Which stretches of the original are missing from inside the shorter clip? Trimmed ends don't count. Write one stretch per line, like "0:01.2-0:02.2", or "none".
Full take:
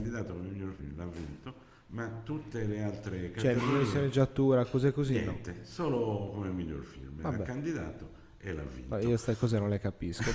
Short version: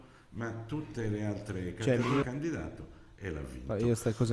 0:03.8-0:07.4